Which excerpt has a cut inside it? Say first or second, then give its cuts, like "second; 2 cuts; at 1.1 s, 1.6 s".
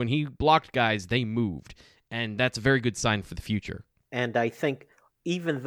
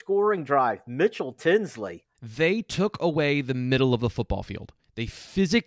second; 1 cut; at 2.1 s